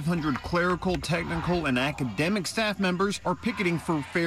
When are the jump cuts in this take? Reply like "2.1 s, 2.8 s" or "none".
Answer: none

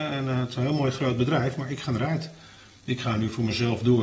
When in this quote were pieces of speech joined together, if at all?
none

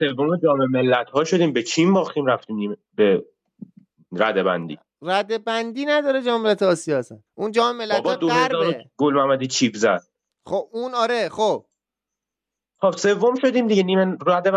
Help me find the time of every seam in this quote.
8.9 s

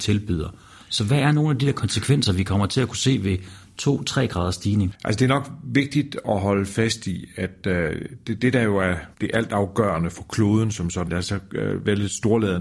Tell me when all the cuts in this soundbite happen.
9.1 s, 11.1 s

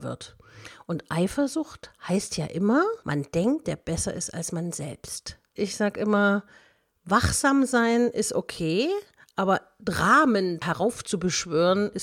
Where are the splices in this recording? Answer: 3.6 s, 5.6 s

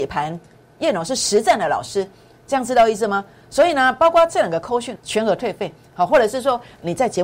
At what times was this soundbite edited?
5.0 s

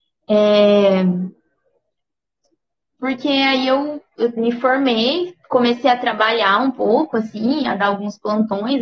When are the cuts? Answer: none

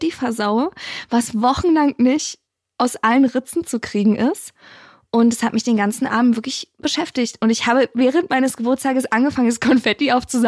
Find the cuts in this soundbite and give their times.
none

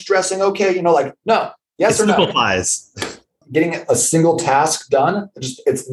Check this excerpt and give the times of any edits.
3.4 s

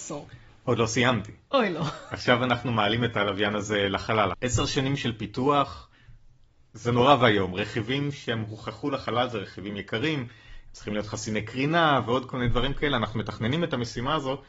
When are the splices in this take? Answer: 4.3 s

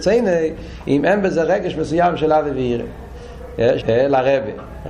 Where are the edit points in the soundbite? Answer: 3.8 s

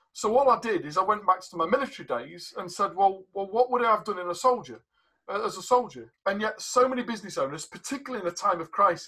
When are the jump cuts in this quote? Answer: 6.1 s

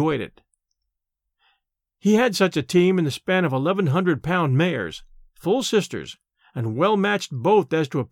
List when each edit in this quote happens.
none

